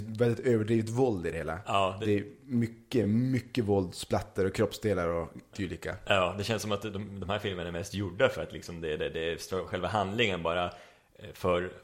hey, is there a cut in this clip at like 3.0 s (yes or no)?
no